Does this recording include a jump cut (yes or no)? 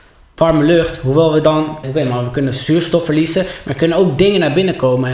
yes